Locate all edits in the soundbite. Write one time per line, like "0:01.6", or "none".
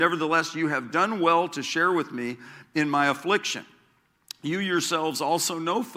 none